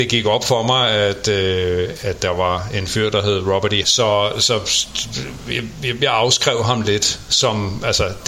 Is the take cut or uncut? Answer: cut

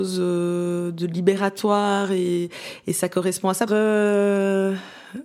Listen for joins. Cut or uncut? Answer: cut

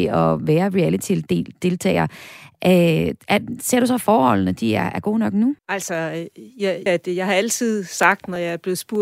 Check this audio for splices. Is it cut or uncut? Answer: cut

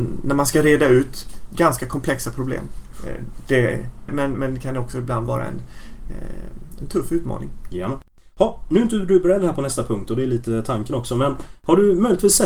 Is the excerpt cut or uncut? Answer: cut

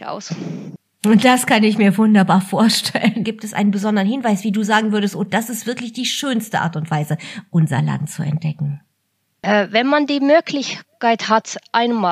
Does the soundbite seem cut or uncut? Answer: cut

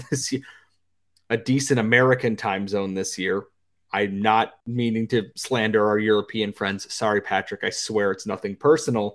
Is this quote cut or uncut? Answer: uncut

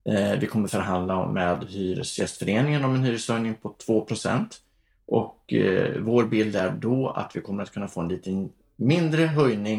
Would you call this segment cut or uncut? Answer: uncut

